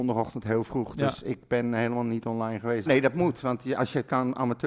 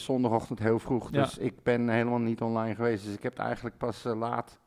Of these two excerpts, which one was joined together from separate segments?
first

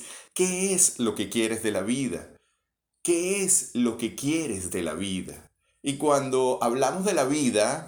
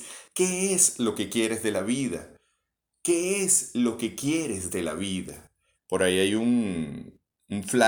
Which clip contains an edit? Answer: second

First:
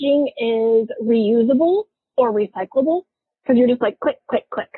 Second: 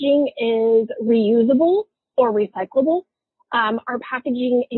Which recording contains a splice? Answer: first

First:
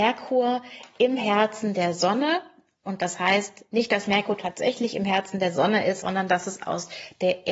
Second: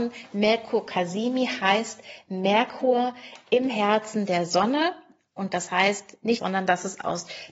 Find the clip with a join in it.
second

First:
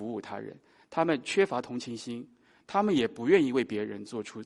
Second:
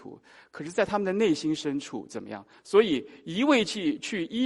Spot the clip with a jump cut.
second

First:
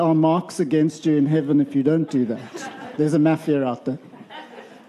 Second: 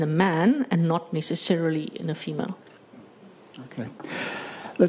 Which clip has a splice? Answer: first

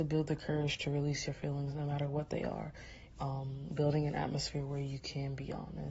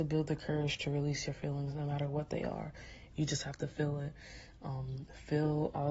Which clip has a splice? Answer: second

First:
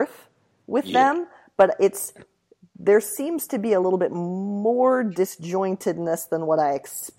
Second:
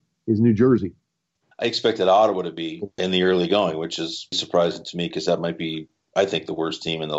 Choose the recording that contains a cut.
second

